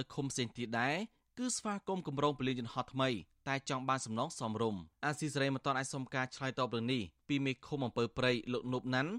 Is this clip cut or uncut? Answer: cut